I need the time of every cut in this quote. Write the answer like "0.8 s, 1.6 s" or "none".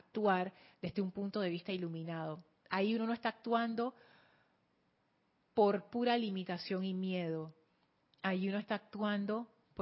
none